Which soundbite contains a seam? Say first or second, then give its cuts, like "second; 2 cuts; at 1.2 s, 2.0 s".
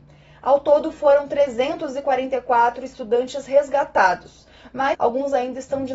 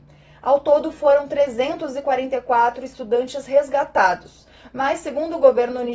first; 1 cut; at 4.9 s